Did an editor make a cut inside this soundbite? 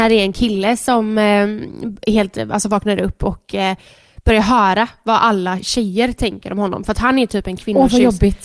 no; 0 cuts

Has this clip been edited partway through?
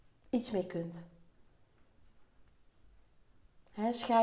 no; 0 cuts

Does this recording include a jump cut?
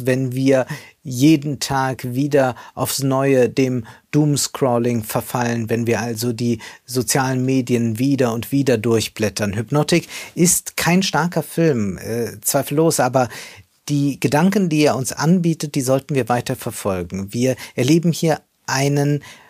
no; 0 cuts

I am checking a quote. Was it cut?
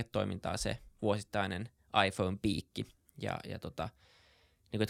no; 0 cuts

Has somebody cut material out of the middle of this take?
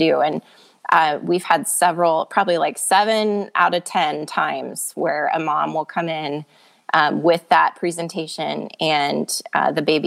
no; 0 cuts

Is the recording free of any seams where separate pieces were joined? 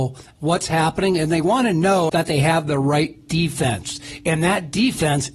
no; 1 cut; at 2.1 s

